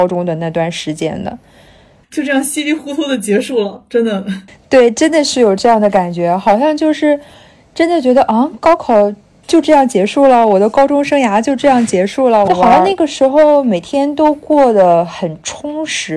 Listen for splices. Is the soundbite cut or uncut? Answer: cut